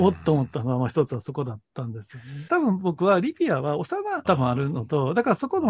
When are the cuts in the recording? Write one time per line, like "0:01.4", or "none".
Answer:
0:02.5
0:04.2